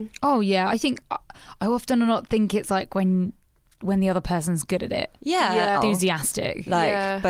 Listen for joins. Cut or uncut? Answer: cut